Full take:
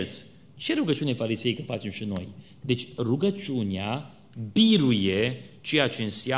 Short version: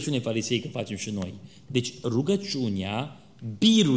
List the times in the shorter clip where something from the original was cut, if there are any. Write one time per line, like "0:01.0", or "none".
none